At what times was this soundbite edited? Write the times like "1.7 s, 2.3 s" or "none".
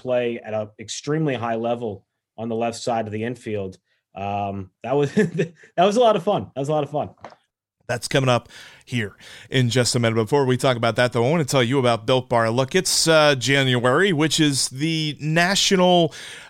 7.7 s